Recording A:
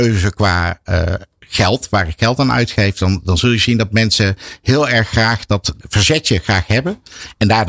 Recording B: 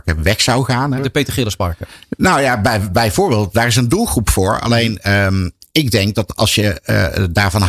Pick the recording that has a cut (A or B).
B